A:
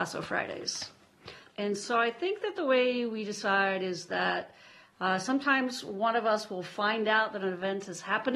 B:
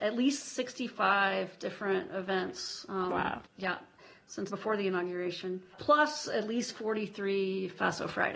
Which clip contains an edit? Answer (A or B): B